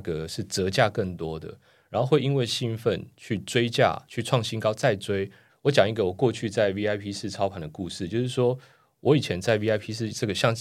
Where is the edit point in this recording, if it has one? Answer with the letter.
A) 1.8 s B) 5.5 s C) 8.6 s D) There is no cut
B